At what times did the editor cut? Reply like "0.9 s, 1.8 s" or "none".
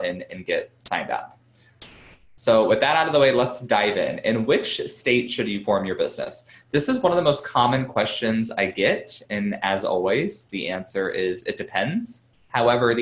none